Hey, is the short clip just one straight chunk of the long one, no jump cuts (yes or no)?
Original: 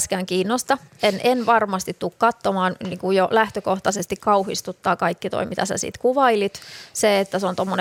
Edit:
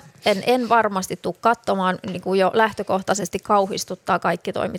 yes